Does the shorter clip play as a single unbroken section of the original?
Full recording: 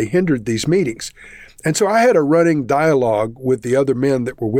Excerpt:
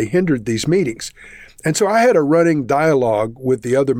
yes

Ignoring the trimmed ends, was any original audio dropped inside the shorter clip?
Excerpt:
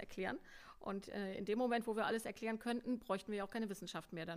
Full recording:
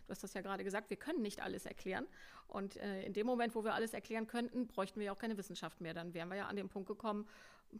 no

